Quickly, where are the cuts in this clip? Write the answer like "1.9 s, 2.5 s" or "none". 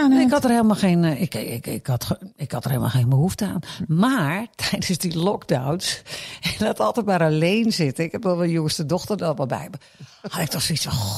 none